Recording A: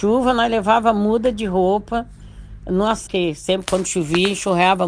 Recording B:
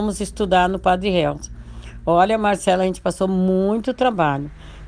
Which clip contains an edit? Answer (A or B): A